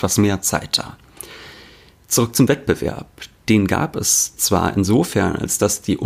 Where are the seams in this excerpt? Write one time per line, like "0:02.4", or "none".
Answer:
none